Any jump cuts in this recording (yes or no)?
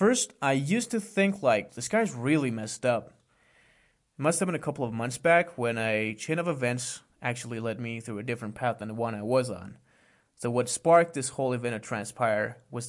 yes